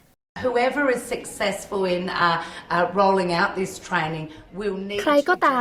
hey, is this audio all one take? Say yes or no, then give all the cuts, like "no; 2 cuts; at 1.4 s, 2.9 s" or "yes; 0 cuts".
yes; 0 cuts